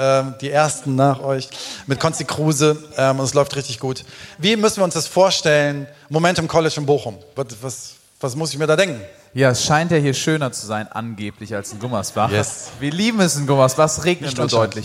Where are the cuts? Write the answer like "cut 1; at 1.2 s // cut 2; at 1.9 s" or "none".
none